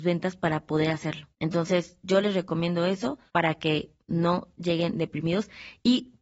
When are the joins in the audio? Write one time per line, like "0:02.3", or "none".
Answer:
0:01.3
0:03.3